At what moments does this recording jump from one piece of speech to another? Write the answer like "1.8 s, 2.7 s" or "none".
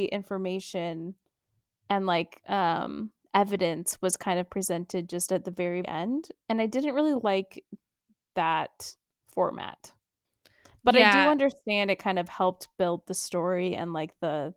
5.8 s